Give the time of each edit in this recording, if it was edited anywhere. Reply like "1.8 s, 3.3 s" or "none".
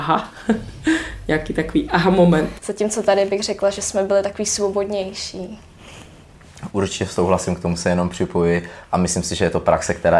2.6 s